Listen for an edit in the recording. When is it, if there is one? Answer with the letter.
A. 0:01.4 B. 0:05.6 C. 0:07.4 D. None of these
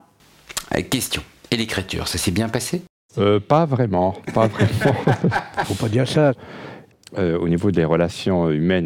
B